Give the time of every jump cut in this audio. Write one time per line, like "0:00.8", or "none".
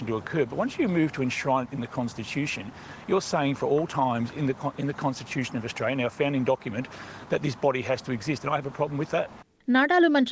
none